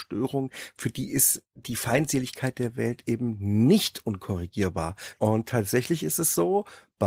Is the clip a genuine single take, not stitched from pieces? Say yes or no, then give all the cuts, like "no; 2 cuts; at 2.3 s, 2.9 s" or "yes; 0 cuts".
no; 1 cut; at 5.2 s